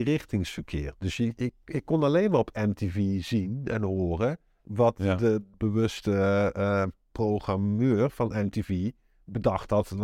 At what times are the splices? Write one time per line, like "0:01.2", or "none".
0:05.5